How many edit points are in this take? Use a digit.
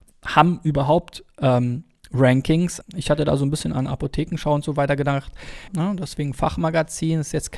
2